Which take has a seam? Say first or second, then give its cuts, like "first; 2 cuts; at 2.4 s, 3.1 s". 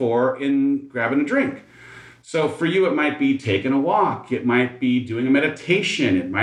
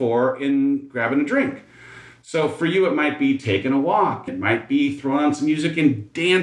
second; 1 cut; at 4.3 s